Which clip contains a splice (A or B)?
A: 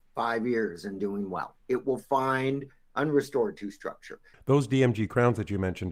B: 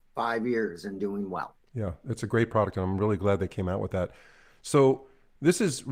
A